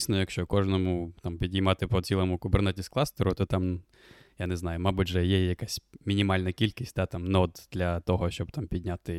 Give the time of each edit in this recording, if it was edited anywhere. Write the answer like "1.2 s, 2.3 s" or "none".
none